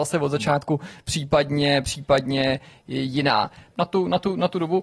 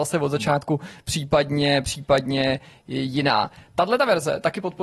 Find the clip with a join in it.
first; 1 cut; at 3.7 s

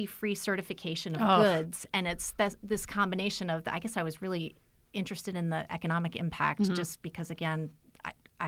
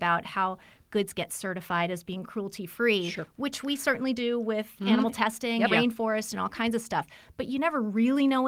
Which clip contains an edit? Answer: second; 1 cut; at 5.7 s

